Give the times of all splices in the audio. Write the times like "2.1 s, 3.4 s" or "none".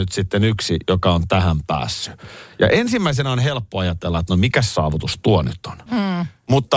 5.9 s

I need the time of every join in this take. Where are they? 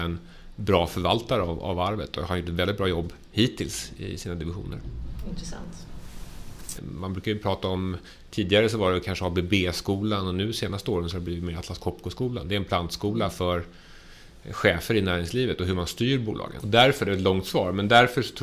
6.8 s, 16.6 s

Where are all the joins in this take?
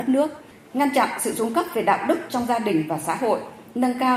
none

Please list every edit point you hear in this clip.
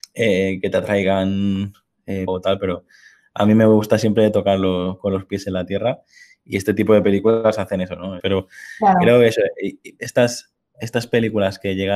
2.3 s, 8.2 s

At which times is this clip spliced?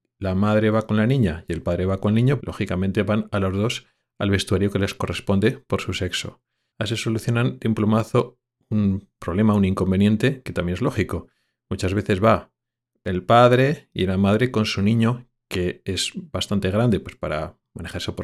2.4 s, 6.7 s

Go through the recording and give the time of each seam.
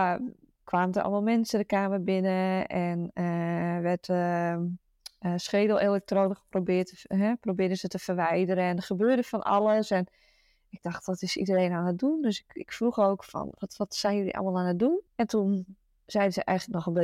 15.1 s

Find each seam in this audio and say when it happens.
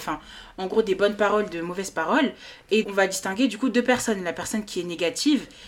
2.8 s

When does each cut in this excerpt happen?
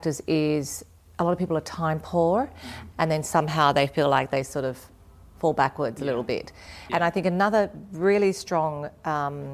2.9 s, 6.9 s

